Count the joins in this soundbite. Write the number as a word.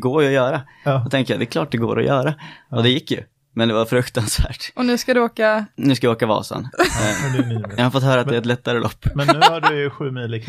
one